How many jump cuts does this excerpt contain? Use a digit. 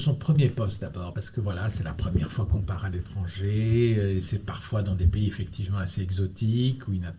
0